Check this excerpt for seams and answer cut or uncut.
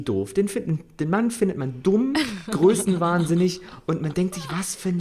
uncut